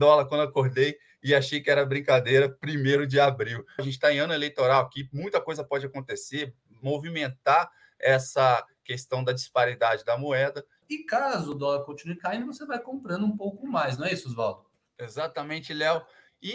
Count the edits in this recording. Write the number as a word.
two